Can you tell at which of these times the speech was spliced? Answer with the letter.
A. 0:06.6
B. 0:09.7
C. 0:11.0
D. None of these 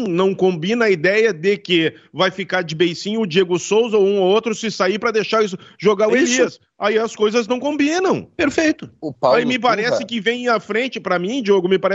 D